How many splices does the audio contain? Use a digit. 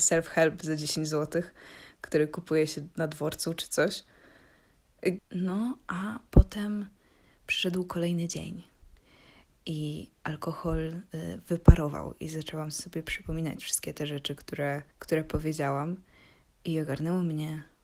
2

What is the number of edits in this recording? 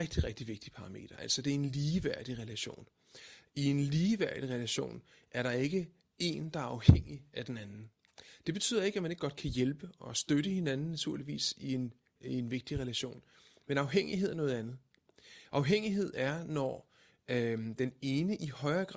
0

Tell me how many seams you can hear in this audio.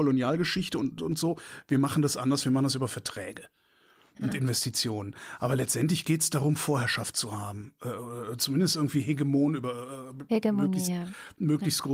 1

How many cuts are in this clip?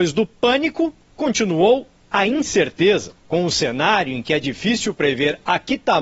1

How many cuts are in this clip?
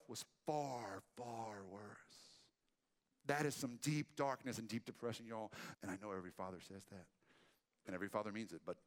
1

